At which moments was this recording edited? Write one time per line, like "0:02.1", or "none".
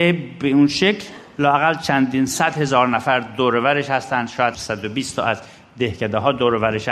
0:04.5